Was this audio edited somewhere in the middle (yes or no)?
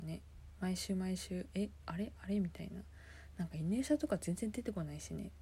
no